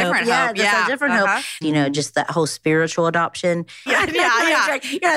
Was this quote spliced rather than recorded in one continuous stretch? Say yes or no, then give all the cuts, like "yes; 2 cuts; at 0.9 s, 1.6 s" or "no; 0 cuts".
yes; 2 cuts; at 1.6 s, 3.9 s